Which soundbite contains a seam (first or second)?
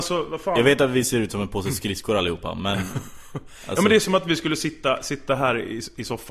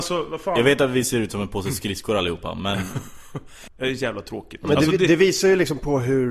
second